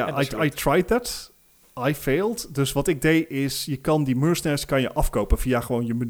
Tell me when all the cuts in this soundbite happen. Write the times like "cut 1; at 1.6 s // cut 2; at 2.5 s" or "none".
none